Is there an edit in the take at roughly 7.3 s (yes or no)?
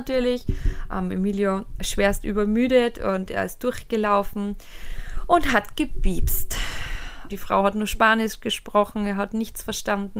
yes